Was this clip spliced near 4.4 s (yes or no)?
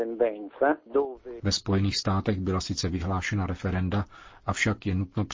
no